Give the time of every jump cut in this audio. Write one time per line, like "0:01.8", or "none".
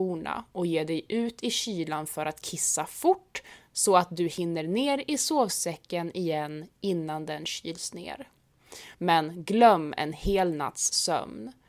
0:08.9